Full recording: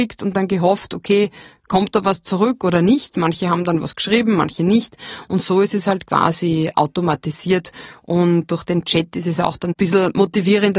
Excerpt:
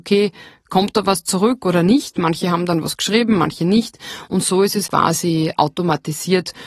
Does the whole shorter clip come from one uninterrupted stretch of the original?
no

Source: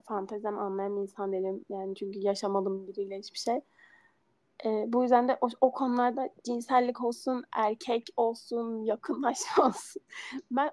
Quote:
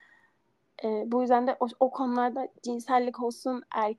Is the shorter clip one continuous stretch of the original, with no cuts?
yes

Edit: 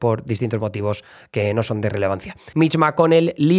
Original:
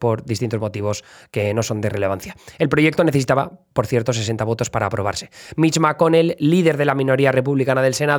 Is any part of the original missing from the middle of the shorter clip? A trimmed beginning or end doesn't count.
yes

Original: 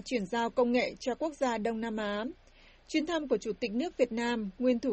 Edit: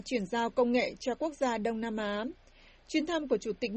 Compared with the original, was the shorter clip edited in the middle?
no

